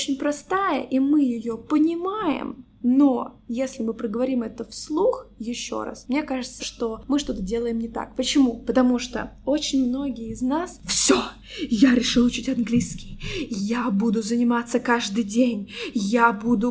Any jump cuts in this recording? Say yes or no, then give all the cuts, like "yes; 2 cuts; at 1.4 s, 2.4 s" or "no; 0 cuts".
yes; 1 cut; at 6.6 s